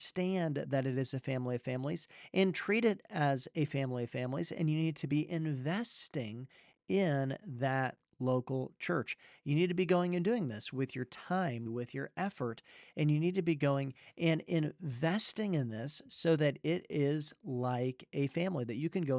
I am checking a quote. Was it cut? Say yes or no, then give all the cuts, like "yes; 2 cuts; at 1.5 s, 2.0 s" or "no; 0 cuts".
yes; 1 cut; at 11.7 s